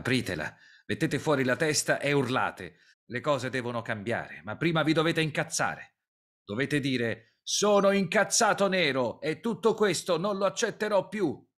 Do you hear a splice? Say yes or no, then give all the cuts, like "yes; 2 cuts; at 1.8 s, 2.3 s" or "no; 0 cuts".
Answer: yes; 1 cut; at 2.9 s